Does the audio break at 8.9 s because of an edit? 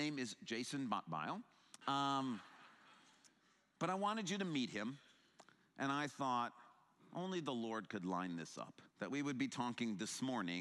yes; 2 cuts; at 1.8 s, 8.9 s

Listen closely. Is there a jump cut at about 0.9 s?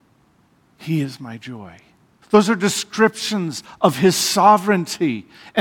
no; 1 cut; at 2.2 s

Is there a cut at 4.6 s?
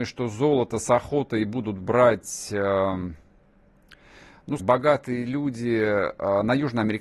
yes; 1 cut; at 4.6 s

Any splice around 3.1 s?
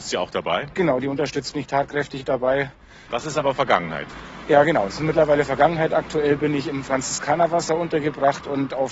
yes; 1 cut; at 3.1 s

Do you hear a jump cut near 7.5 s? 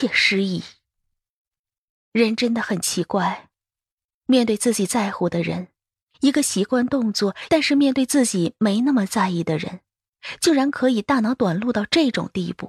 yes; 1 cut; at 7.5 s

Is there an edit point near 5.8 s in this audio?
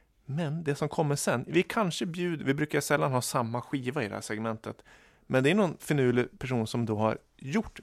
yes; 1 cut; at 5.8 s

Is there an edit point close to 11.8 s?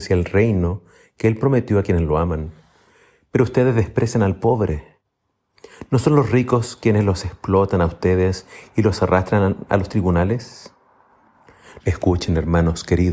yes; 1 cut; at 11.8 s

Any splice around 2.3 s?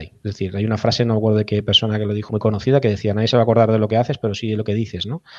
yes; 1 cut; at 2.3 s

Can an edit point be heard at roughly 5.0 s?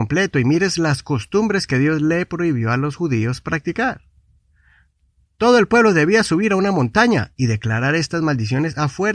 no; 0 cuts

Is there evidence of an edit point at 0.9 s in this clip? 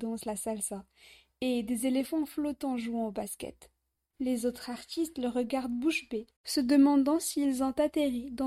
no; 1 cut; at 4.1 s

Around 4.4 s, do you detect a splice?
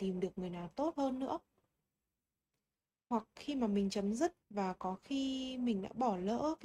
yes; 1 cut; at 4.4 s

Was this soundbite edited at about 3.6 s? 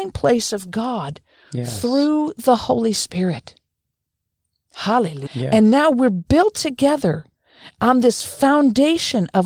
no; 1 cut; at 5.3 s

